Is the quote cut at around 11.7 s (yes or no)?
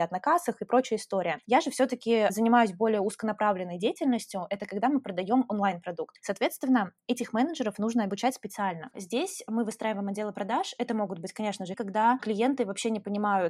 yes